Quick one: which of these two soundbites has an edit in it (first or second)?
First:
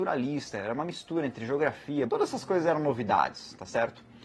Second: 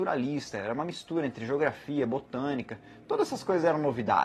first